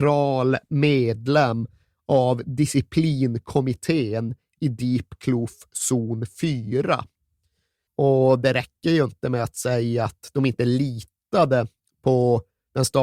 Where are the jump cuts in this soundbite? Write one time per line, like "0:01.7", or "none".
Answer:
0:07.9